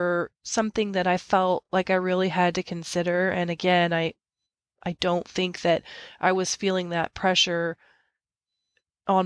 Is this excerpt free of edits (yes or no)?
yes